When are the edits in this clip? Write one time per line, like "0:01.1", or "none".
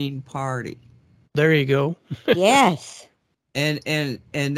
0:01.2